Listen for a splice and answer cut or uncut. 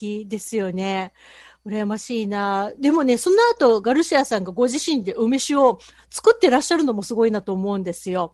uncut